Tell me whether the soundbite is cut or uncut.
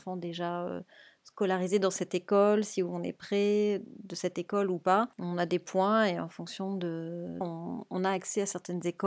cut